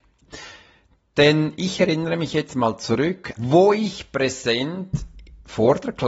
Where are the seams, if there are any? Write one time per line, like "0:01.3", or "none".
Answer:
0:03.4